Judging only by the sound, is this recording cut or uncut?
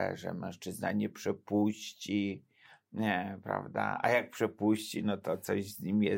uncut